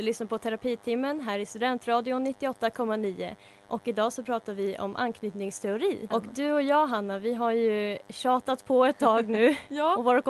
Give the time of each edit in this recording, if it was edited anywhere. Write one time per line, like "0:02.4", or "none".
0:06.1